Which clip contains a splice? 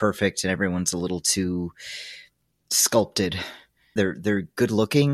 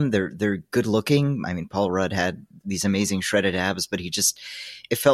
first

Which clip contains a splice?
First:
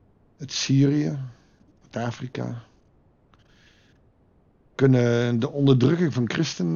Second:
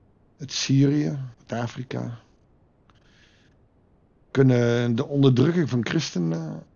second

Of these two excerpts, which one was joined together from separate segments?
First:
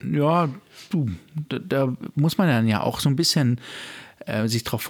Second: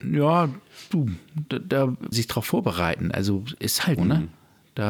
second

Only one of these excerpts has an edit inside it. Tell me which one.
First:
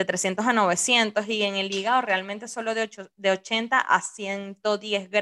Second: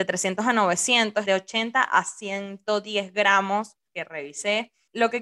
second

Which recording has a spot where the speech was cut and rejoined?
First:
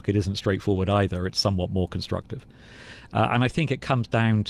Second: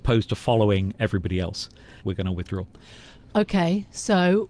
second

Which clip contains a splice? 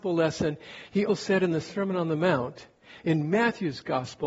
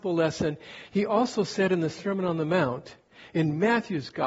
first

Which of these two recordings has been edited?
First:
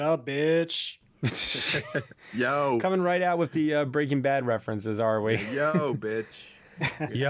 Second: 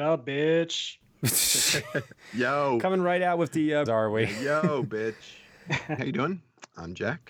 second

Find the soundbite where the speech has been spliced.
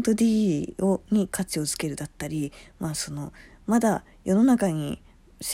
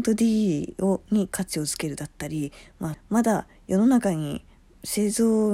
second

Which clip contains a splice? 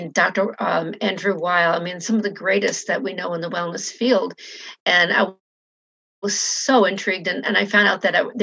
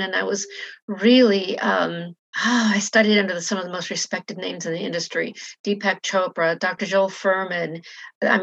second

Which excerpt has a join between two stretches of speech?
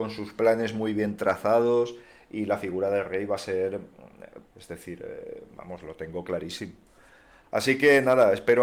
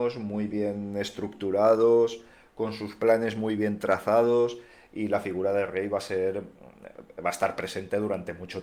first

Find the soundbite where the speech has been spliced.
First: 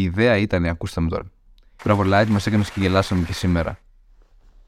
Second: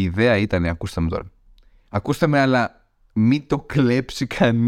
first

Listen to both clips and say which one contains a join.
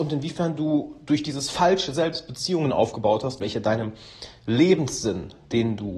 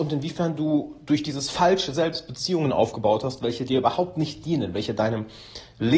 first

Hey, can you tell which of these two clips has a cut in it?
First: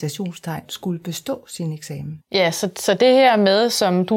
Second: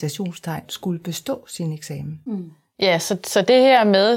first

